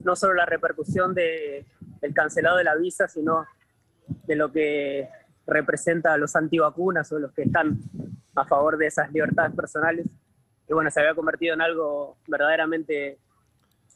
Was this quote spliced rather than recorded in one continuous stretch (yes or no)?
no